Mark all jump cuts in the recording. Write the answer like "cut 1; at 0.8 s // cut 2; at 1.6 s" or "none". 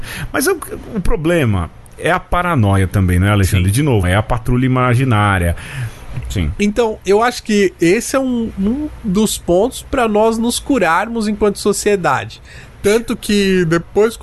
cut 1; at 4.0 s // cut 2; at 6.2 s // cut 3; at 12.8 s